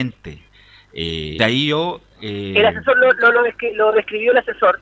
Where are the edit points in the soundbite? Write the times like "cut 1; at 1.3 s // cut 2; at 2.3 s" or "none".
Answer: cut 1; at 1.4 s